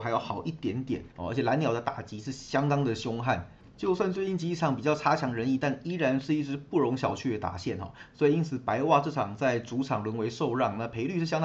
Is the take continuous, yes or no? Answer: no